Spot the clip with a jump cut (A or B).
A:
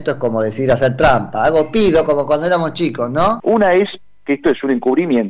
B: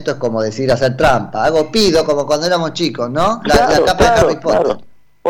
A